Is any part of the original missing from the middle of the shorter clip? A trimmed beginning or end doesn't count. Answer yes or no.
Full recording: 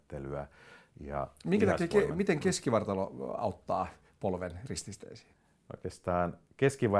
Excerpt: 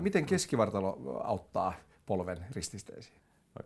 no